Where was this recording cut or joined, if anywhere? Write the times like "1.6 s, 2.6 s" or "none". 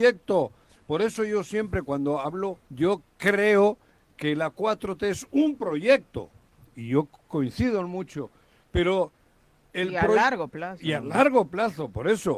2.6 s